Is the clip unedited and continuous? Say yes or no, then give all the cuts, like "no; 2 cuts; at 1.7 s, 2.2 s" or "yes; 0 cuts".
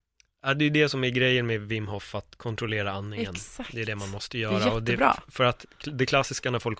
yes; 0 cuts